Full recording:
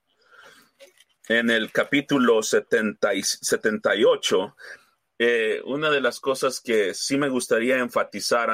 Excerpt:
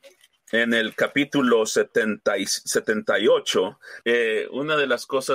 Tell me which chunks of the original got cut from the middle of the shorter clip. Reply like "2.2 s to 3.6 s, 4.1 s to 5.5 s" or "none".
4.8 s to 5.2 s